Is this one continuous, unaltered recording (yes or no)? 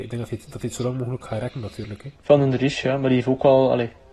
no